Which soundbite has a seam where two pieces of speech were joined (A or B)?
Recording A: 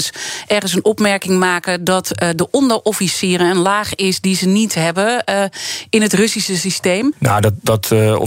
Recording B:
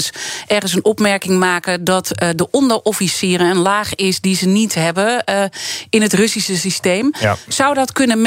A